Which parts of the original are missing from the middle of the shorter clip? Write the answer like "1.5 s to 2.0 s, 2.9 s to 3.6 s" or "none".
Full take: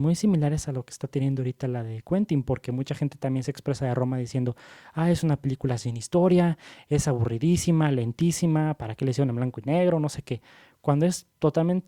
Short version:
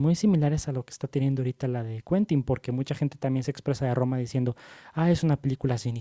none